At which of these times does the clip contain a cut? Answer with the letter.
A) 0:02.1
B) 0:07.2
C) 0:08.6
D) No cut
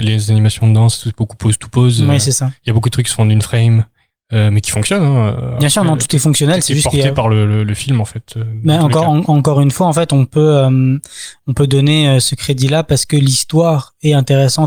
D